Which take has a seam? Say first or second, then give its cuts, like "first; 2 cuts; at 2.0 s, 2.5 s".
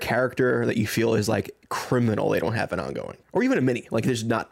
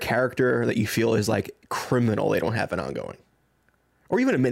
first; 1 cut; at 3.2 s